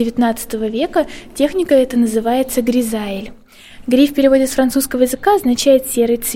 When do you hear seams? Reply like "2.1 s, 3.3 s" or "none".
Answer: none